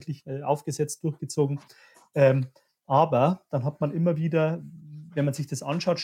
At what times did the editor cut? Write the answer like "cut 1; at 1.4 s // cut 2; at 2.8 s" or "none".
none

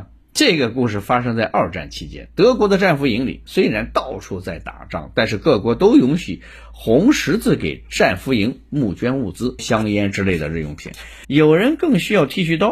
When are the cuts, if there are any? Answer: cut 1; at 9.6 s // cut 2; at 11.2 s

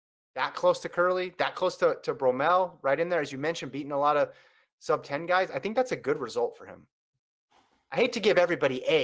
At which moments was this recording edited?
none

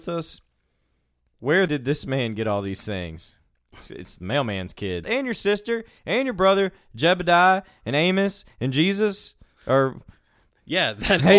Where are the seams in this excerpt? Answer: cut 1; at 1.7 s // cut 2; at 5.0 s

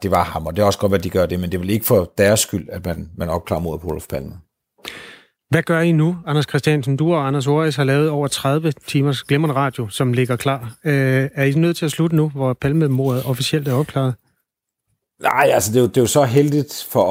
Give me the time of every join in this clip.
none

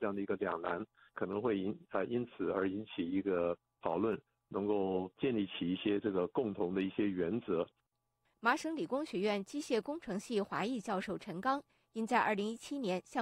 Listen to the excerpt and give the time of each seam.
cut 1; at 4.5 s // cut 2; at 8.3 s

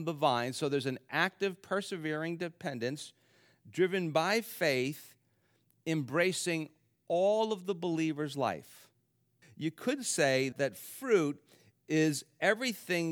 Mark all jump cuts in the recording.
cut 1; at 9.4 s // cut 2; at 10.5 s

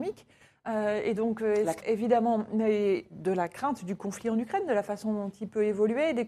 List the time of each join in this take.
cut 1; at 1.8 s

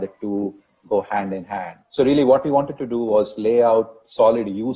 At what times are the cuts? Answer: cut 1; at 1.8 s

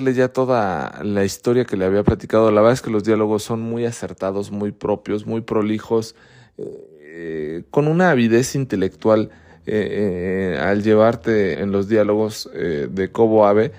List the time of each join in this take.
cut 1; at 11.5 s

